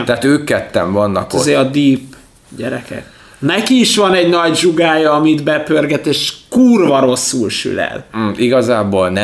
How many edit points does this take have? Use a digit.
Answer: 0